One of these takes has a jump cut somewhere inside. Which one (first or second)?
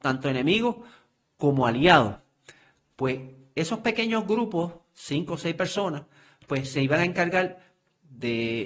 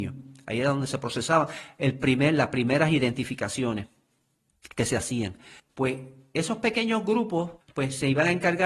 second